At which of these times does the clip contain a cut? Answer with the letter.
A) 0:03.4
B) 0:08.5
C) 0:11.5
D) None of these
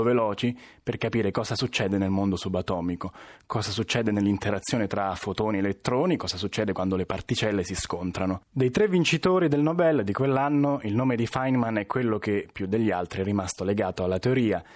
B